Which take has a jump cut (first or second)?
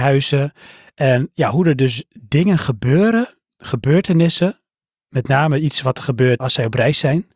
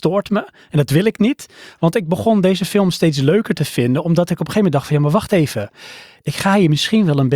first